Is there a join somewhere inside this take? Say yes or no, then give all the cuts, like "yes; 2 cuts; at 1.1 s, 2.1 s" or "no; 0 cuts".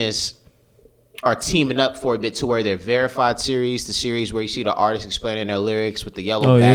no; 0 cuts